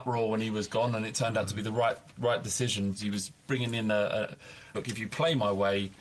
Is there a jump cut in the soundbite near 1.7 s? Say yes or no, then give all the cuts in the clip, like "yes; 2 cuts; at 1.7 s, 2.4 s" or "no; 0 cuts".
no; 2 cuts; at 3.0 s, 4.7 s